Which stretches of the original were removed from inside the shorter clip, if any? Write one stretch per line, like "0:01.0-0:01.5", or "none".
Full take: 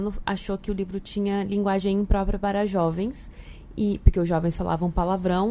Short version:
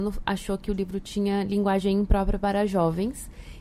none